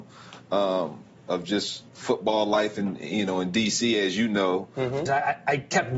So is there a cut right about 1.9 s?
yes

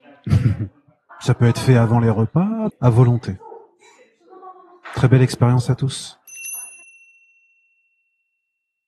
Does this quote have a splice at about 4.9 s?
no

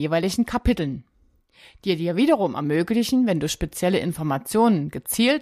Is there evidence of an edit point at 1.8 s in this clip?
no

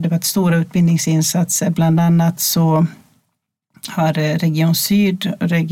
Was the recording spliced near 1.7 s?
no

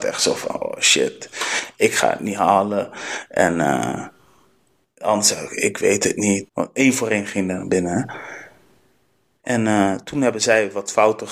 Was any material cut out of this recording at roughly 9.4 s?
yes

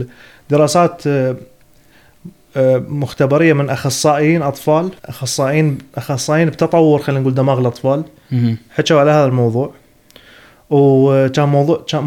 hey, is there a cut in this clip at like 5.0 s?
yes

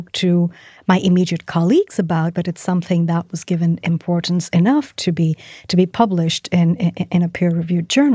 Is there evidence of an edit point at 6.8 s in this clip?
no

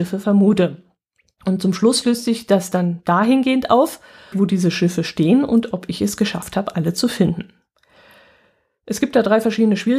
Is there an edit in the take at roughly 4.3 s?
yes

